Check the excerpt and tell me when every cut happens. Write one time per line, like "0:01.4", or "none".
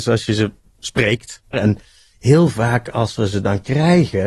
0:01.5